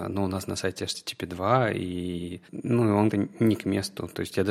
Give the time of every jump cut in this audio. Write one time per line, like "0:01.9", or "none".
0:03.1